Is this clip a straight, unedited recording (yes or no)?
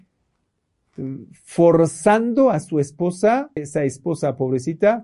no